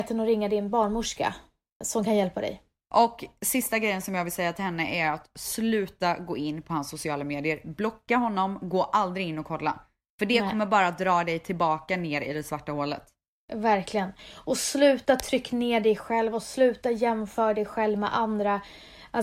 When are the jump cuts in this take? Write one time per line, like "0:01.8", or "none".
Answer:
0:01.8